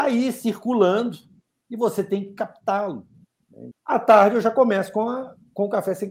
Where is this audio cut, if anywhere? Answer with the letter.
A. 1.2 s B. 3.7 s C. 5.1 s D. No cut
B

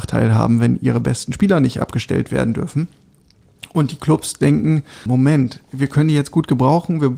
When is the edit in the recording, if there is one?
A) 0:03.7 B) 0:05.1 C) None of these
B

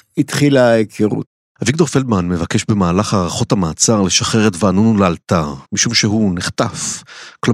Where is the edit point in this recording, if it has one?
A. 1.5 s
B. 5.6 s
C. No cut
B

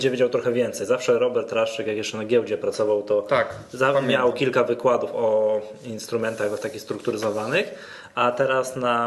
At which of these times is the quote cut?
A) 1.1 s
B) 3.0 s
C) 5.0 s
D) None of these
D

